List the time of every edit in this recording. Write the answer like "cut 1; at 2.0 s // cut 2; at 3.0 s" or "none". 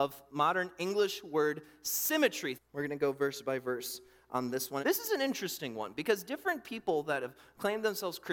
cut 1; at 2.5 s // cut 2; at 4.8 s